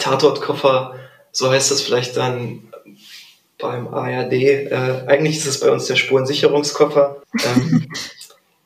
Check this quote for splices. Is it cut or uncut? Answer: cut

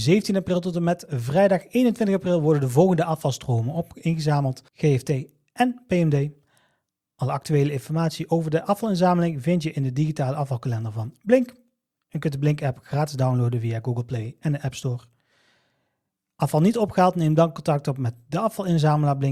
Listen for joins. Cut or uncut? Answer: cut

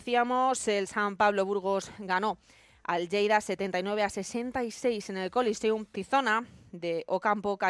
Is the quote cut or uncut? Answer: cut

